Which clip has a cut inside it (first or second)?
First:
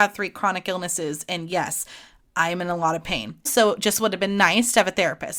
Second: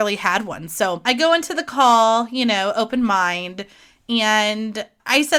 first